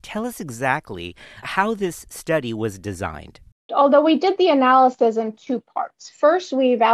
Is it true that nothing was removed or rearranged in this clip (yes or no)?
no